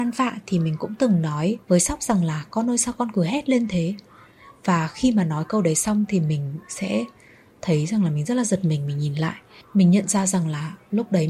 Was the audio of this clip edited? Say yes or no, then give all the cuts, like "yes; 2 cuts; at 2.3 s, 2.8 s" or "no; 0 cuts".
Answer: yes; 1 cut; at 1.6 s